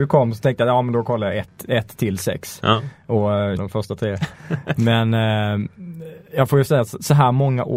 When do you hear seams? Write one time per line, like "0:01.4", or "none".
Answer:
0:03.6